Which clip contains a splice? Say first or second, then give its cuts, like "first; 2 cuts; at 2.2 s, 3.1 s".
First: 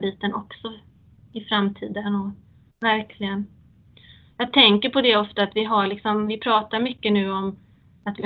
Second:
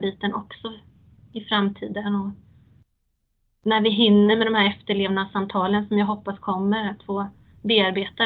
first; 1 cut; at 2.7 s